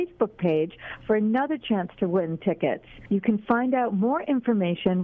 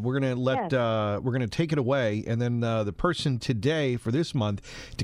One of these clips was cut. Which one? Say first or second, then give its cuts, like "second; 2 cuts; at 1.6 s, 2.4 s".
first; 1 cut; at 3.1 s